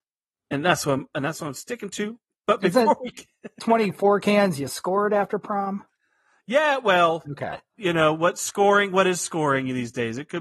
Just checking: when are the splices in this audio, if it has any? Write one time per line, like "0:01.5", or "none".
none